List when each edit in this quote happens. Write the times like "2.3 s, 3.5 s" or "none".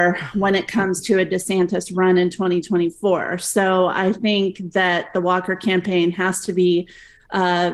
none